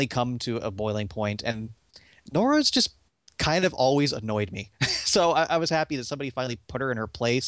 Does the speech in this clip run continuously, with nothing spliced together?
yes; 0 cuts

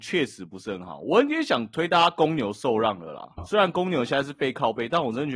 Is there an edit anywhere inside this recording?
yes; 1 cut; at 3.4 s

